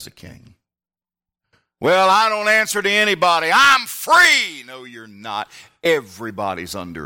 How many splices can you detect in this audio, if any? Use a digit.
0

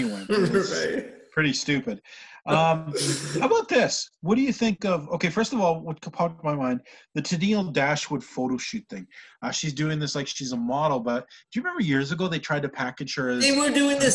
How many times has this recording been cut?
0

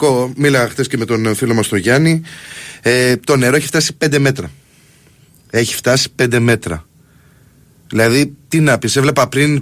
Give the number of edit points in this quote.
0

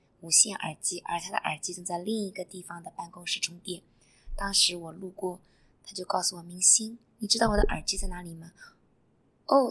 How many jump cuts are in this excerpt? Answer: 0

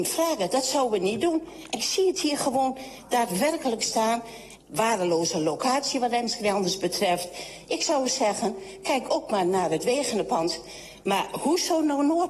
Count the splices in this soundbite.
1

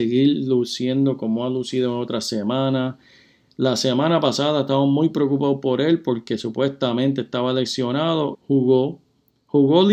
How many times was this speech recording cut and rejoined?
1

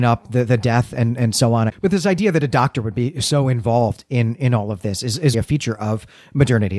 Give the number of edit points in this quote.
2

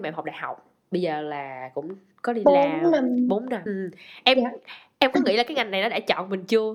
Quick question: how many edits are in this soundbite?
1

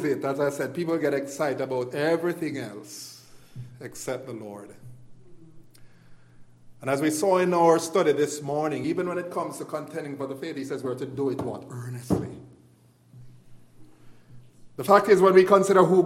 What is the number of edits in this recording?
0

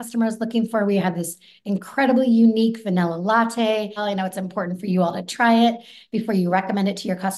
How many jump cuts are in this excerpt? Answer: 1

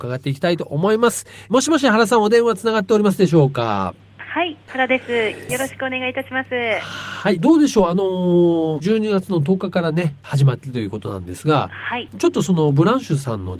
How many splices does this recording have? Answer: 0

